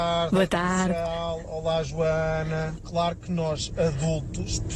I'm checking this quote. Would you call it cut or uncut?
cut